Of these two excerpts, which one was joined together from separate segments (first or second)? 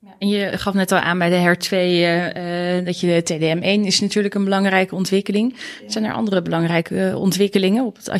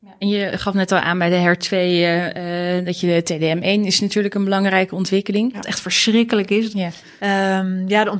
second